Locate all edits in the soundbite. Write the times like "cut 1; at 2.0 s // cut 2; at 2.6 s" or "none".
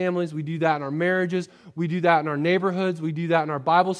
none